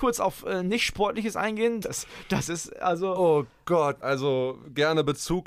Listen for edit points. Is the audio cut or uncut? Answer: cut